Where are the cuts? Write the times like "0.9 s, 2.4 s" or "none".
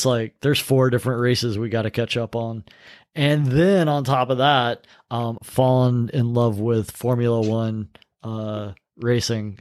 5.4 s